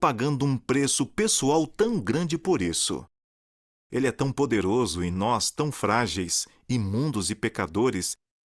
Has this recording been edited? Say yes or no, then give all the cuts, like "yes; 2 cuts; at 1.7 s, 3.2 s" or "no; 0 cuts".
no; 0 cuts